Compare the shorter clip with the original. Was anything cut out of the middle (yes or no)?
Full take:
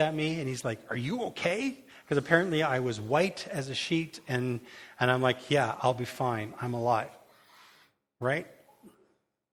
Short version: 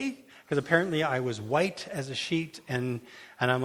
no